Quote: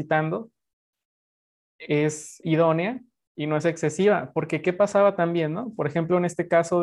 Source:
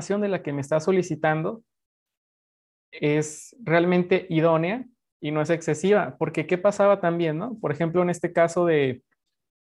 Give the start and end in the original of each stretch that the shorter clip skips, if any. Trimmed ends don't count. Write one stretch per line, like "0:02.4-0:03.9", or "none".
0:03.6-0:04.3